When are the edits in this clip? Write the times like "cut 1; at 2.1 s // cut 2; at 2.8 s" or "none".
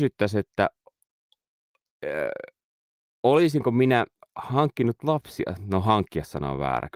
none

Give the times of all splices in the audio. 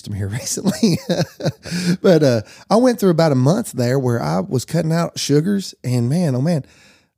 none

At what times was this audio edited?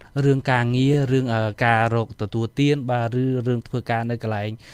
none

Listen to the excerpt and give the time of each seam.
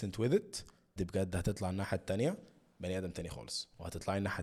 cut 1; at 1.0 s

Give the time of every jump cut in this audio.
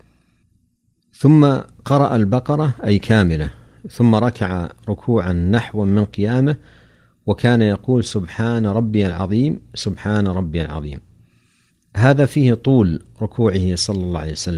none

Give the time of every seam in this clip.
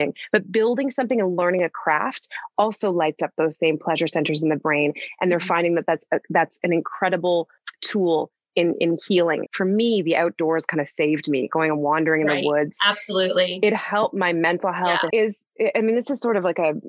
cut 1; at 9.5 s // cut 2; at 15.1 s

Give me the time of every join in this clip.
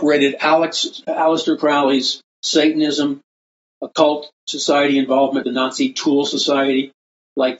cut 1; at 5.4 s

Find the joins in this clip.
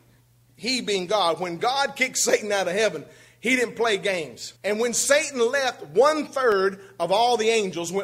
cut 1; at 4.6 s

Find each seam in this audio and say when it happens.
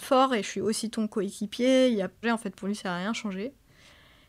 cut 1; at 2.2 s

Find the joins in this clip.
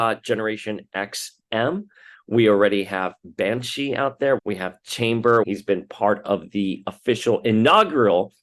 cut 1; at 4.4 s // cut 2; at 5.4 s

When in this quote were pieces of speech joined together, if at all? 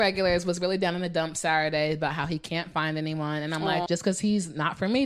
cut 1; at 3.9 s

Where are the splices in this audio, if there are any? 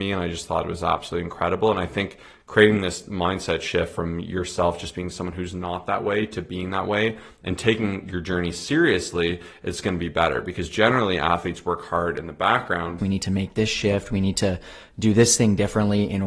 cut 1; at 13.0 s

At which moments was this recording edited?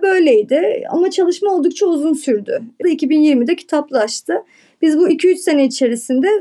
cut 1; at 2.8 s

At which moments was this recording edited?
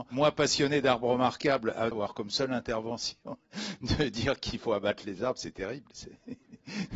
cut 1; at 1.9 s

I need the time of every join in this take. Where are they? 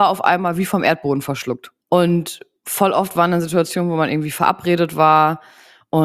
cut 1; at 1.8 s

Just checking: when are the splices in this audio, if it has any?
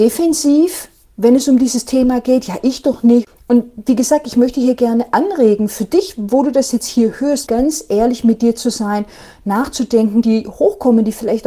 cut 1; at 7.5 s // cut 2; at 10.2 s

